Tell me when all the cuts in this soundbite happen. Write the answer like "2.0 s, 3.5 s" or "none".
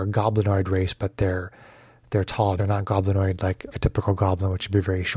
2.6 s, 3.7 s

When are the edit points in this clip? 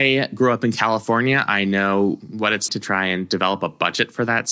2.7 s

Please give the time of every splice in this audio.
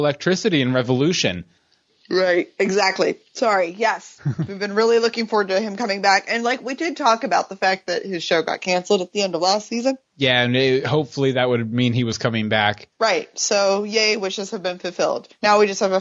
none

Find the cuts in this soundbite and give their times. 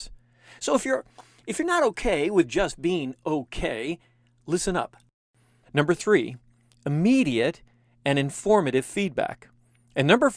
5.6 s

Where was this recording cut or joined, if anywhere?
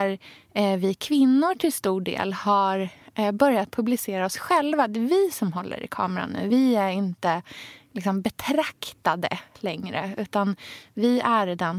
none

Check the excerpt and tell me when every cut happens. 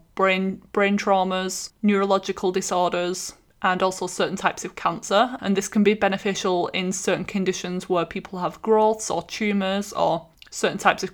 5.4 s

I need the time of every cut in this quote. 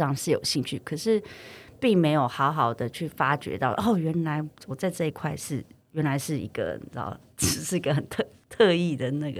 none

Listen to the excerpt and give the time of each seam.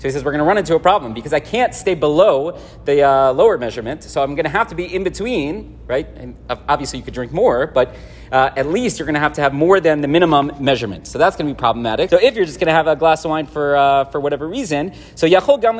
12.1 s

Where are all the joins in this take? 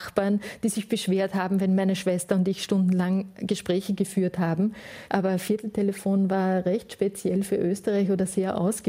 5.1 s

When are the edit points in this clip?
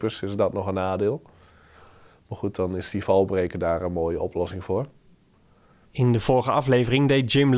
5.9 s

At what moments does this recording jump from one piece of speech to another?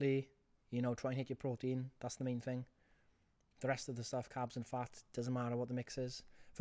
none

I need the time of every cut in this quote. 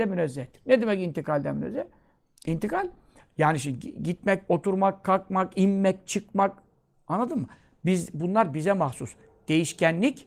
4.5 s

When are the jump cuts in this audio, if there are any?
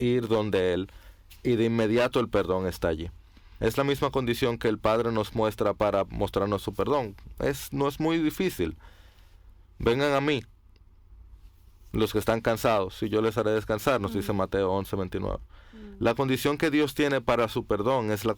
3.6 s

